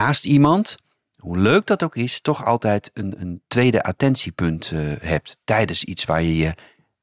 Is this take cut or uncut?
cut